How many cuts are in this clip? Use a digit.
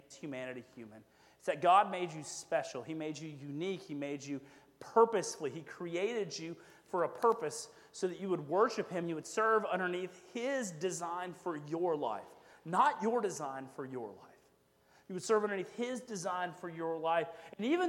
0